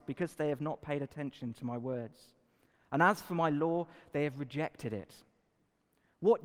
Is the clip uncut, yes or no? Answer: yes